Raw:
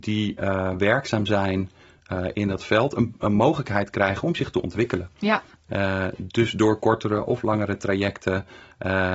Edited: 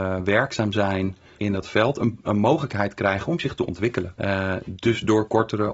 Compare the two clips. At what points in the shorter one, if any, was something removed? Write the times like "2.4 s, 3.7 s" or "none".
1.4 s, 4.2 s